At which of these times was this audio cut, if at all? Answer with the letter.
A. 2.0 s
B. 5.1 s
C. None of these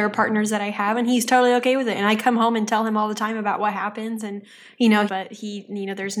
B